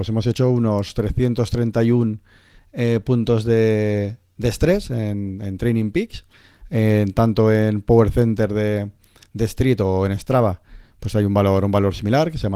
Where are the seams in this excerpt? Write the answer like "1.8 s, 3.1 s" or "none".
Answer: none